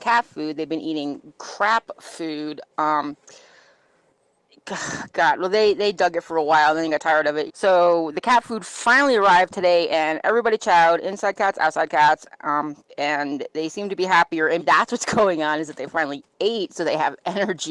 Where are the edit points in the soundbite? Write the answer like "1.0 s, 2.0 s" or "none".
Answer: 7.5 s, 14.6 s